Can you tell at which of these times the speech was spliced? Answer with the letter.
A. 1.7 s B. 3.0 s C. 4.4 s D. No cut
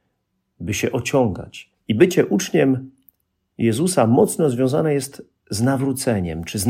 A